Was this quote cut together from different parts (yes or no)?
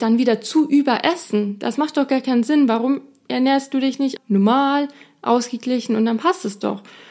yes